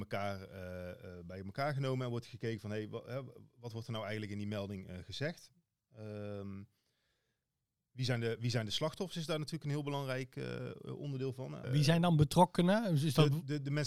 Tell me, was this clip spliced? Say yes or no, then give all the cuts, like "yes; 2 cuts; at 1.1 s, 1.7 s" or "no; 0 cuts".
yes; 1 cut; at 11.6 s